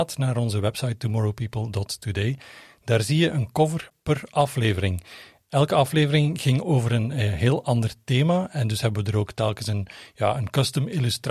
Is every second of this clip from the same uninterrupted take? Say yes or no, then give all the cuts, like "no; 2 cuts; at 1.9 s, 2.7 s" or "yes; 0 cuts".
yes; 0 cuts